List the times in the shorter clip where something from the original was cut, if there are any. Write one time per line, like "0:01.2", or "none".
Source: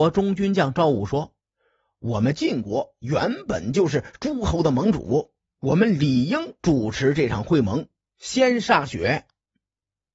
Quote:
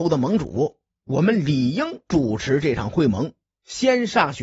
none

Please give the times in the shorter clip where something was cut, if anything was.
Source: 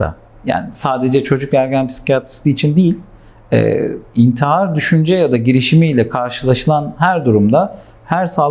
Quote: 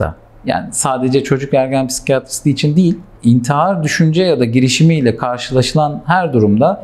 0:03.2

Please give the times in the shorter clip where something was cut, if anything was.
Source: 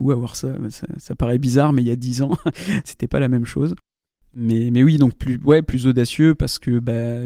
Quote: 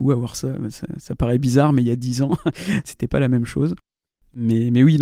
none

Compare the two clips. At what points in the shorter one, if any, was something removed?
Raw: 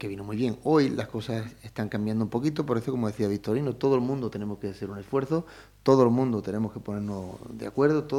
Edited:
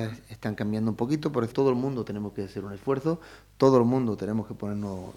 0:01.5

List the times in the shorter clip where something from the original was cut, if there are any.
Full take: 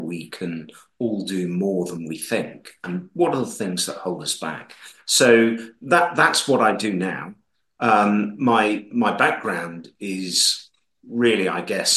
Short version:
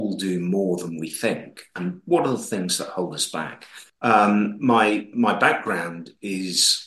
0:03.9

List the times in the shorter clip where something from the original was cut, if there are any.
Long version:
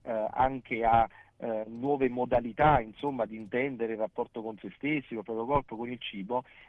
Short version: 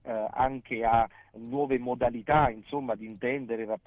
0:01.3

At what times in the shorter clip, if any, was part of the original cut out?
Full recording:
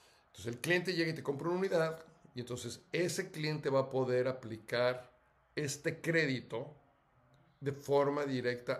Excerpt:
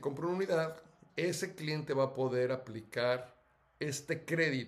0:01.1

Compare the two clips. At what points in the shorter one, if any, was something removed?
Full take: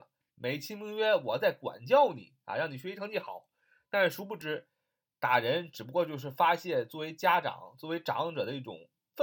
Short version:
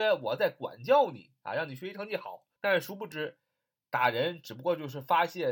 0:02.5

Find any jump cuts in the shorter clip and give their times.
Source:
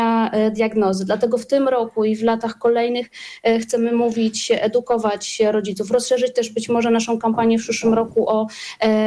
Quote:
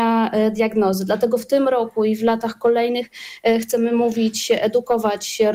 none

